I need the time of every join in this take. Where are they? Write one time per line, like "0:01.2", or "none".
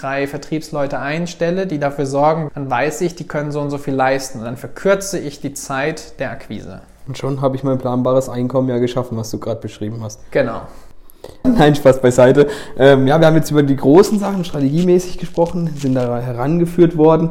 0:02.5
0:11.4